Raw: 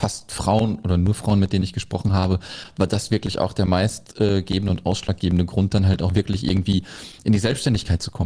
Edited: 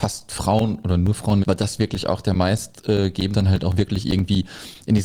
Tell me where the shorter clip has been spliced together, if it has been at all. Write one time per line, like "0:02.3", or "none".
0:01.4
0:03.3